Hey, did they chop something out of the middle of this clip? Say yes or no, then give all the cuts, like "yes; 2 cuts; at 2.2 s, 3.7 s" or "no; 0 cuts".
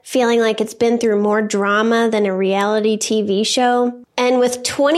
yes; 1 cut; at 4.0 s